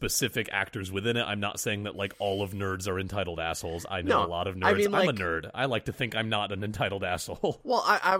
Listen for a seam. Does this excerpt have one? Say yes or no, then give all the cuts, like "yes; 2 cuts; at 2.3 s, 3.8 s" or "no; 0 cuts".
no; 0 cuts